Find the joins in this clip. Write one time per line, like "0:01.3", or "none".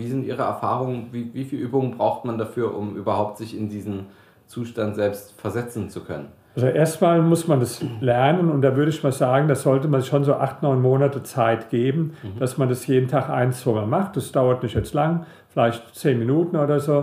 none

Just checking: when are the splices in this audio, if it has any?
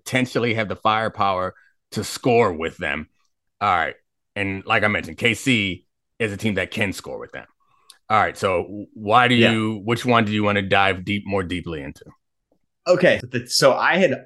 0:03.5
0:13.2

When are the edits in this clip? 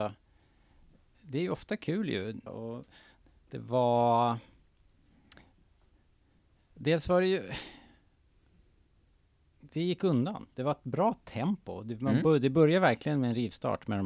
0:02.5

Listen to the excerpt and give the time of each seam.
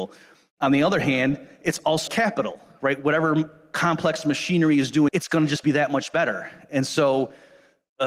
0:02.1
0:05.1

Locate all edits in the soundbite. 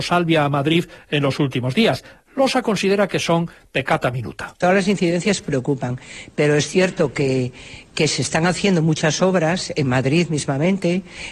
none

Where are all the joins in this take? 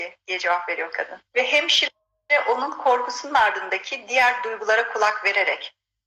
0:01.3

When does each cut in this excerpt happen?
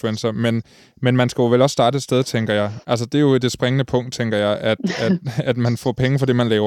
0:02.8

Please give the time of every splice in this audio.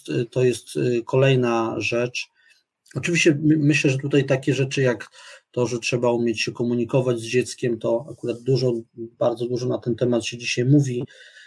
none

